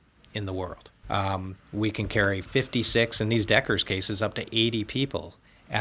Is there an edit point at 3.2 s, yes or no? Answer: no